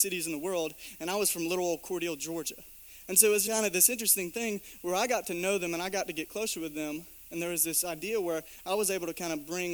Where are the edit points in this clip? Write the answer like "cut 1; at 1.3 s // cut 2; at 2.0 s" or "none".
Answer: cut 1; at 3.5 s